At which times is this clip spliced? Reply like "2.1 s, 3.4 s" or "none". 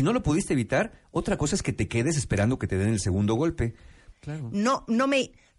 4.1 s